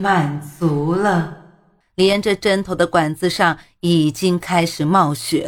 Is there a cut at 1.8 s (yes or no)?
yes